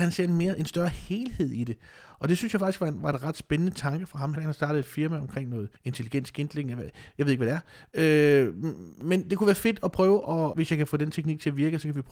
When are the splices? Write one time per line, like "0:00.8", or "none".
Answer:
0:04.3
0:05.8
0:10.5